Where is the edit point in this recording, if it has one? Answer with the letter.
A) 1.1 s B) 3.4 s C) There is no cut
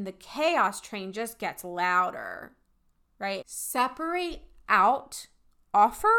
B